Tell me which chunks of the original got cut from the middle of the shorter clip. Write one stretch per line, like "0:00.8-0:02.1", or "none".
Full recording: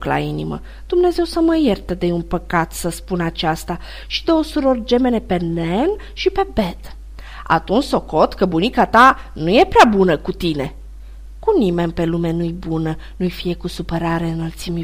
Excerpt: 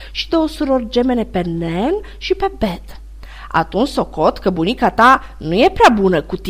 none